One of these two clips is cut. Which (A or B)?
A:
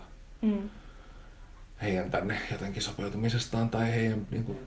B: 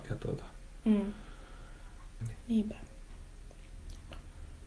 B